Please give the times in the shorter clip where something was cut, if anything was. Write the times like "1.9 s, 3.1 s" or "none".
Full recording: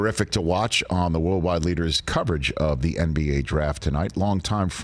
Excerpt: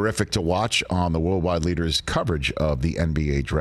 none

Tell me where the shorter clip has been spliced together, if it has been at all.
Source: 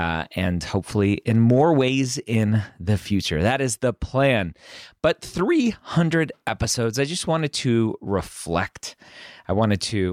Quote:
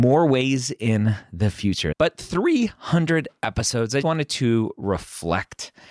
1.9 s, 4.0 s

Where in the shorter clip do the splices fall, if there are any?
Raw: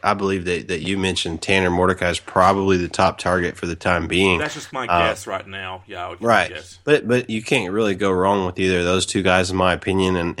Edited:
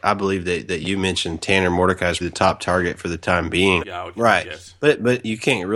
2.2 s, 3.8 s

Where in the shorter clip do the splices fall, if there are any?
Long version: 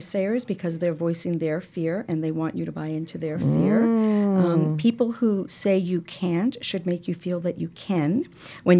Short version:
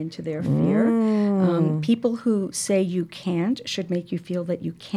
none

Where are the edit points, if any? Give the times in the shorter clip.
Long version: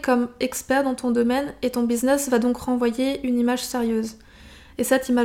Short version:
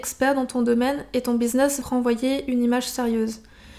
1.8 s

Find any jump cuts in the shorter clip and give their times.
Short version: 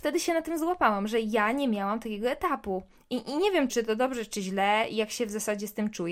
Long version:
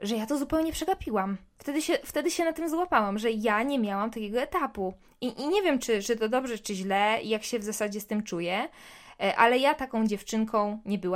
3.7 s

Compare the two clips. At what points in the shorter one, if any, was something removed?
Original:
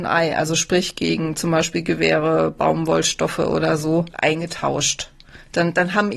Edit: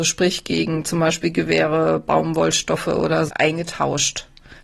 3.3 s

